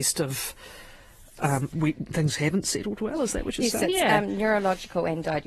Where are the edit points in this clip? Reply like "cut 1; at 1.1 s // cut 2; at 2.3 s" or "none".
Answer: cut 1; at 1.7 s